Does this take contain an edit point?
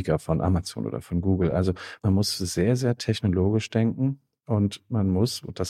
no; 0 cuts

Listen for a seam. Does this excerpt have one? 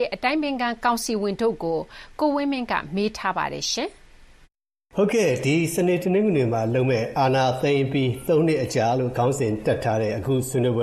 no; 0 cuts

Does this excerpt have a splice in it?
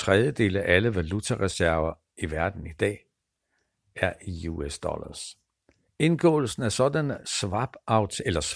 no; 0 cuts

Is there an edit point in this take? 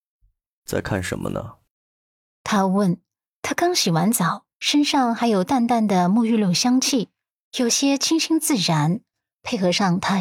no; 0 cuts

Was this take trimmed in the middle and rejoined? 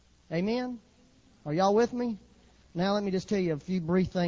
no; 0 cuts

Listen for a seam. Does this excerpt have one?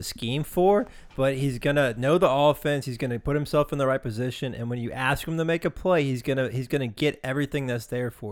no; 0 cuts

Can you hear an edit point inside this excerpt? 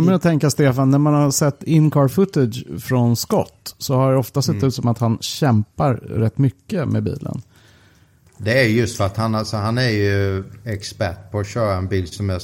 no; 0 cuts

